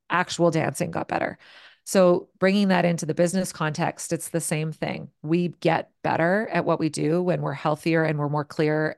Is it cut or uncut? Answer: uncut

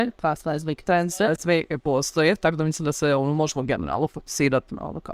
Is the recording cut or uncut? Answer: uncut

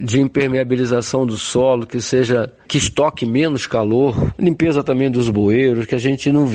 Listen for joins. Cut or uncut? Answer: cut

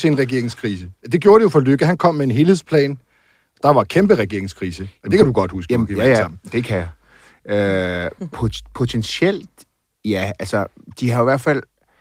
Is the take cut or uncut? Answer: uncut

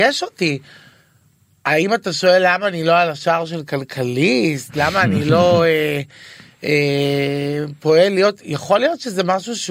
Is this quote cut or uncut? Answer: uncut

